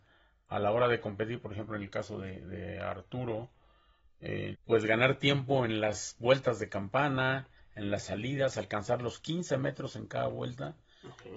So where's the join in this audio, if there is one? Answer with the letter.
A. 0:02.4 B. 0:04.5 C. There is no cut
B